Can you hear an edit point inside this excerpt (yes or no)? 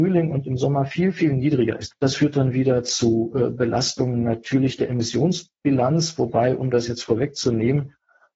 yes